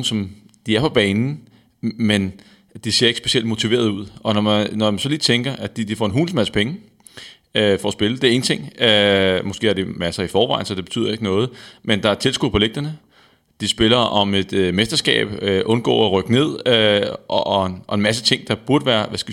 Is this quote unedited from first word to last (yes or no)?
yes